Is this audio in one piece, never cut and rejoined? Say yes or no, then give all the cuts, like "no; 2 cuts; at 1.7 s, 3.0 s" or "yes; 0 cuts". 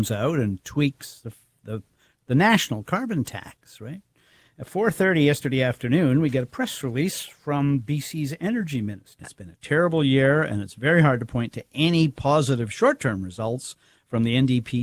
no; 1 cut; at 9.2 s